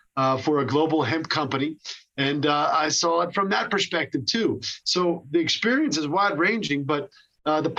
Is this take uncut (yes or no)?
yes